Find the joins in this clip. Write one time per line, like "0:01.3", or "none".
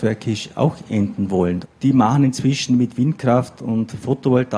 0:01.6